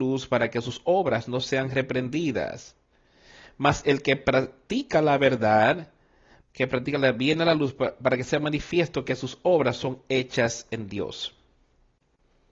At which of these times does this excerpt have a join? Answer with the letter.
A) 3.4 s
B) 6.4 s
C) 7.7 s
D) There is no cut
B